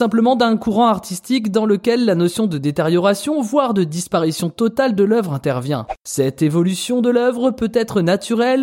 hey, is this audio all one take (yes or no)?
yes